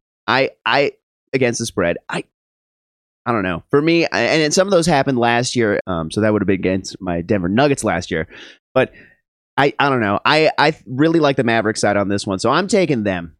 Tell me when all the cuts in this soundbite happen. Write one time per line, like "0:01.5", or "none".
0:05.8